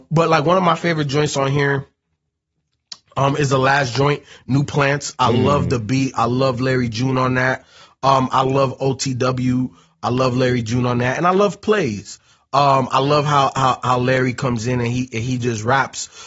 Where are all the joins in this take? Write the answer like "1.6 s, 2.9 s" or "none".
none